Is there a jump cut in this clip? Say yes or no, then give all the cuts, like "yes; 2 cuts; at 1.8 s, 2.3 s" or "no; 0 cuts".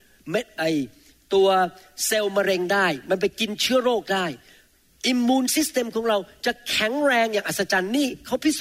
no; 0 cuts